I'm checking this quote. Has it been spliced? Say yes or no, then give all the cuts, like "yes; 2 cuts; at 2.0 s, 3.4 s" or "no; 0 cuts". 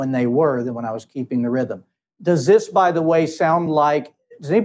no; 0 cuts